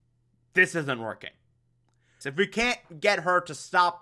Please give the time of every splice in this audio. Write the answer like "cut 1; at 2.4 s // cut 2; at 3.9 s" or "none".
cut 1; at 2.2 s